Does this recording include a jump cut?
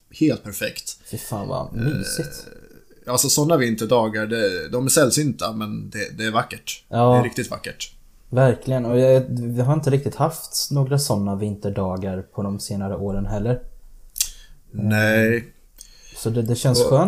no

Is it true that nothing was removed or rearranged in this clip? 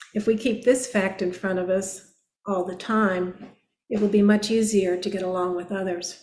yes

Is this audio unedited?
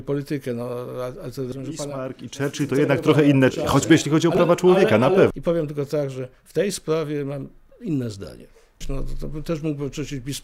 no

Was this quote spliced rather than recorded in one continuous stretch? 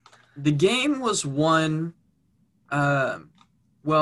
no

